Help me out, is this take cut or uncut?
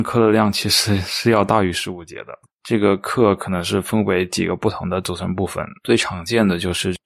cut